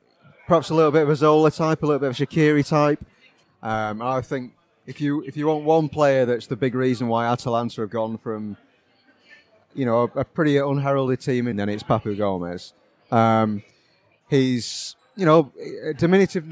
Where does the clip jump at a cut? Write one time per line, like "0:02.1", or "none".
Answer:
0:03.4
0:11.5